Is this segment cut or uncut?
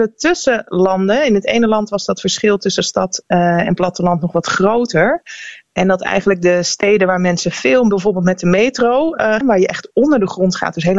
cut